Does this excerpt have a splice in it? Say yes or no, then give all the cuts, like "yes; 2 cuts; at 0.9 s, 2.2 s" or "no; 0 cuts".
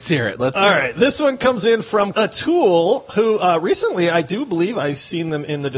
yes; 1 cut; at 2.1 s